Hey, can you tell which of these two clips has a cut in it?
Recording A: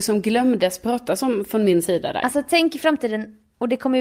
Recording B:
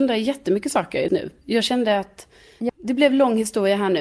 B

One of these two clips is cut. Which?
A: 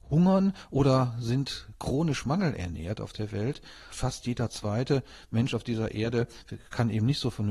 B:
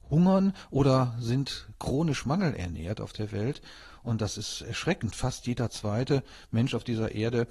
A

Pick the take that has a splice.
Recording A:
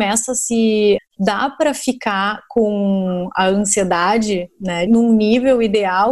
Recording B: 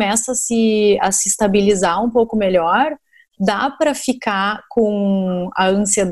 A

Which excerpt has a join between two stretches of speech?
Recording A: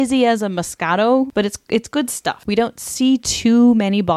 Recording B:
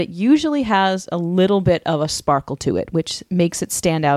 A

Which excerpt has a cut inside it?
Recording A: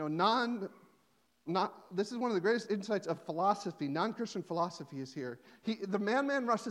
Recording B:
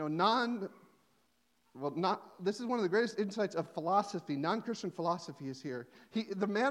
A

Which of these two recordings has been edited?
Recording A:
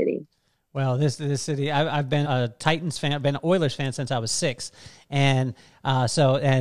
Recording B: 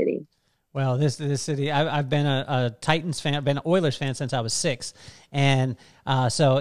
A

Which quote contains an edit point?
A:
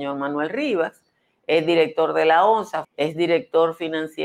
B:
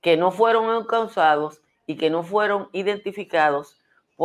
A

